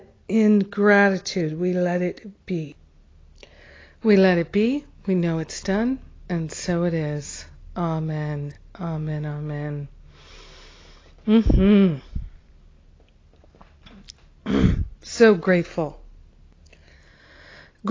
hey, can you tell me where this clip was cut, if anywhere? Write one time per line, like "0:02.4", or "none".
none